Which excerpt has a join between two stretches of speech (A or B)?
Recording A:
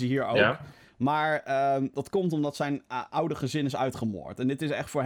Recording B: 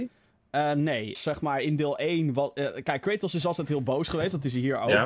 B